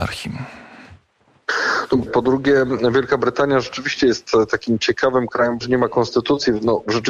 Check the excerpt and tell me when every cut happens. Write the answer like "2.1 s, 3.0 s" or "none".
2.1 s, 5.6 s